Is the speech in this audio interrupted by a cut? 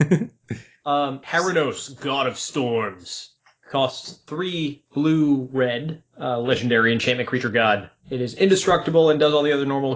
yes; 1 cut; at 1.2 s

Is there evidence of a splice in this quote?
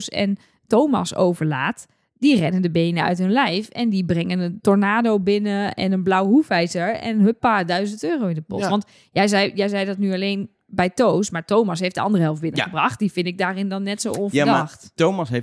no; 0 cuts

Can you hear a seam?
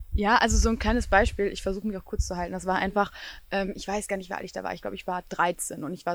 no; 0 cuts

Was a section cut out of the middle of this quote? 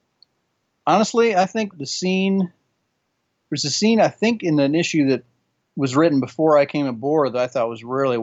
yes; 1 cut; at 1.7 s

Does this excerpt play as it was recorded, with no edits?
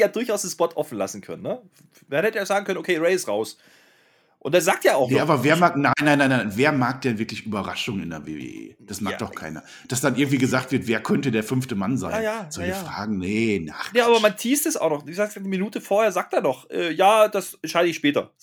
yes; 0 cuts

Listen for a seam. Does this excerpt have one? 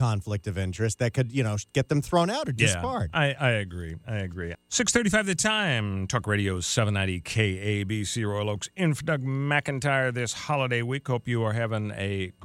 yes; 1 cut; at 4.5 s

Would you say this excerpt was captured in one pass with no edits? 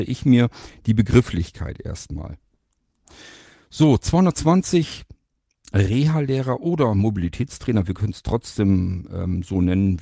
yes; 0 cuts

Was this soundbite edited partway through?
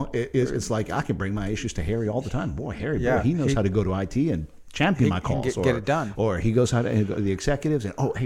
no; 0 cuts

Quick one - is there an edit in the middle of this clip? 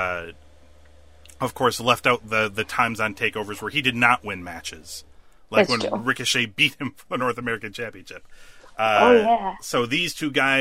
no; 0 cuts

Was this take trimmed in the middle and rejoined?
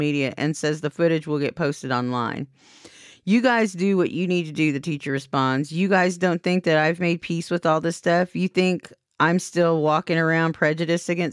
no; 0 cuts

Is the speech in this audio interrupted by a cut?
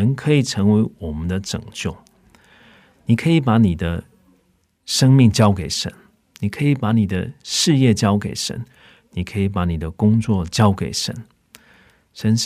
no; 0 cuts

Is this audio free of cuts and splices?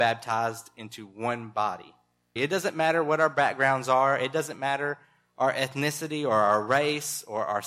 no; 1 cut; at 2.4 s

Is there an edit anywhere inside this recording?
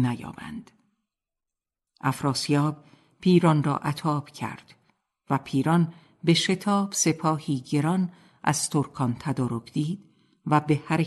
yes; 1 cut; at 1.9 s

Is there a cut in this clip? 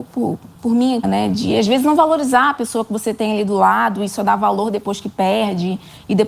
yes; 1 cut; at 1.0 s

